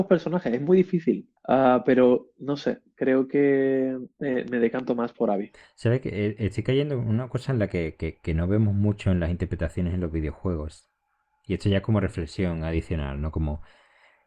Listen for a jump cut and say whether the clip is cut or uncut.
cut